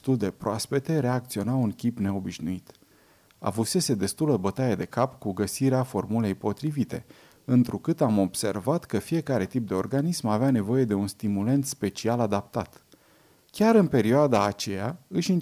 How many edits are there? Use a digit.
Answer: 1